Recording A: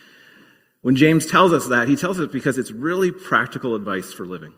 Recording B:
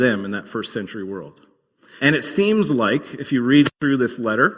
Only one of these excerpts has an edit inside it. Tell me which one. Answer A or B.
B